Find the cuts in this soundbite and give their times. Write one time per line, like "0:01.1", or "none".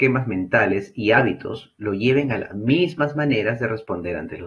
none